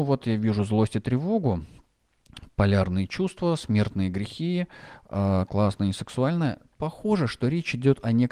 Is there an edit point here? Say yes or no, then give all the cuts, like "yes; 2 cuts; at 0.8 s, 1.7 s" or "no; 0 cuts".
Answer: no; 0 cuts